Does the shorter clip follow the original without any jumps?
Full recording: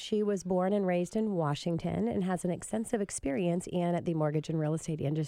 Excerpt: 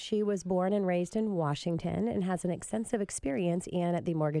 yes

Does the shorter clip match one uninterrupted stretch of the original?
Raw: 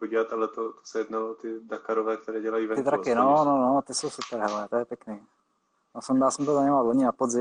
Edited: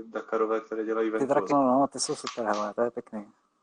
no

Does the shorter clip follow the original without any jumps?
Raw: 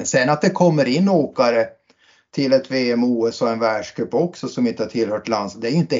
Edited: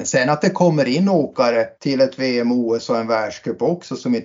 no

